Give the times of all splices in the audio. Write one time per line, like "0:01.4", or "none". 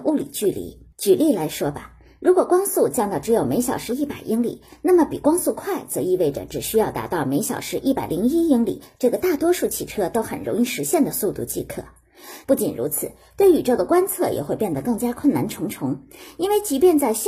0:00.9
0:12.4